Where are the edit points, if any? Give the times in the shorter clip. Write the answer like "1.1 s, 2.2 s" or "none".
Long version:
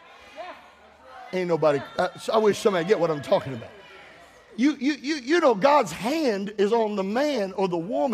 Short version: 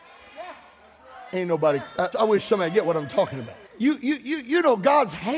2.1 s, 3.7 s

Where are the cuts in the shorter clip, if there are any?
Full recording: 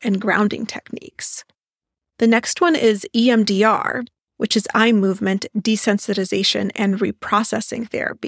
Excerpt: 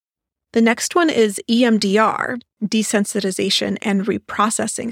2.6 s

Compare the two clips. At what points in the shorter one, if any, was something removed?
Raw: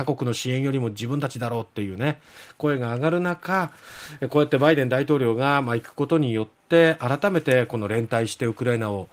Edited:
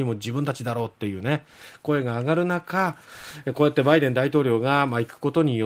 none

